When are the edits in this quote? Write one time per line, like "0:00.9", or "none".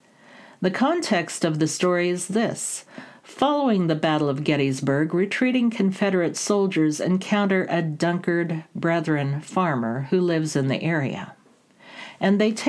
none